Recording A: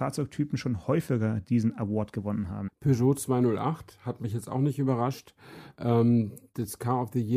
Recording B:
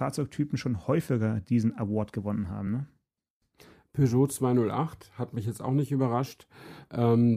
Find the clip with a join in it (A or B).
A